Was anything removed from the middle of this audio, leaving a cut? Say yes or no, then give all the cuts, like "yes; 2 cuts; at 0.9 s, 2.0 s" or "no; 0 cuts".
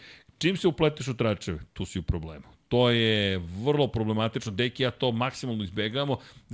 no; 0 cuts